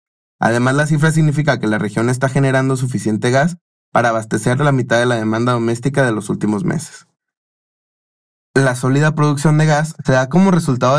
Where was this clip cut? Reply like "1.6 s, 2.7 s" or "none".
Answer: none